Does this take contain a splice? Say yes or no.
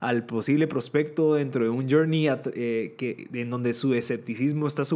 no